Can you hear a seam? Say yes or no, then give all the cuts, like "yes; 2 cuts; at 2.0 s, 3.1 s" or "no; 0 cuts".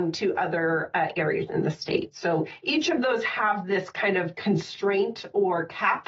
no; 0 cuts